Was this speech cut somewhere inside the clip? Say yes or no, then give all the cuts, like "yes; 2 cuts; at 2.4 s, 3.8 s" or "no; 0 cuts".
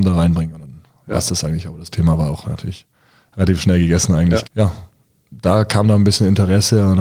yes; 1 cut; at 4.4 s